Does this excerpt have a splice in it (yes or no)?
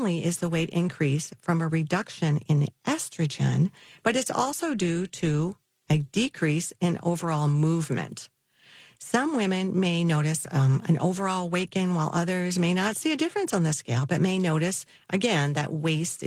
no